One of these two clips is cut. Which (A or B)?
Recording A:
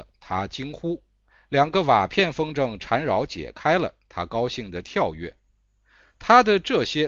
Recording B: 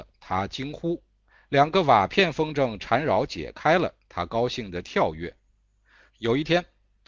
B